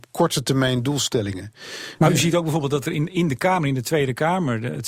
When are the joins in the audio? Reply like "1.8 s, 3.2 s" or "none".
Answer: none